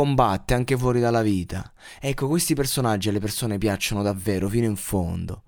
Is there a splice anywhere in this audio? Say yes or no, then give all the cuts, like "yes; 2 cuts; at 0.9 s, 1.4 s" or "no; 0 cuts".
no; 0 cuts